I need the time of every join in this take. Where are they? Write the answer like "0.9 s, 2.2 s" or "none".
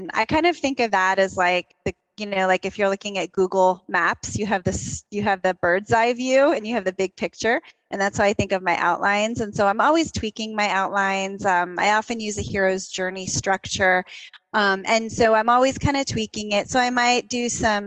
none